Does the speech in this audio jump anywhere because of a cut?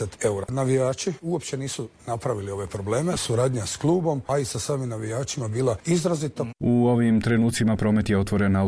yes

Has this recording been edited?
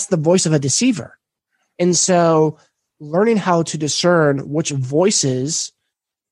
no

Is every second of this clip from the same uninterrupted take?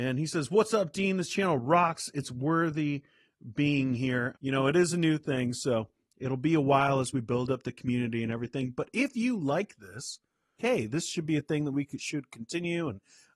no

